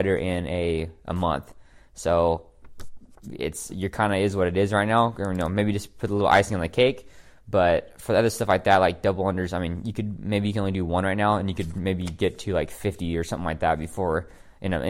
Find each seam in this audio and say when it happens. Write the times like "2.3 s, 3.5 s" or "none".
none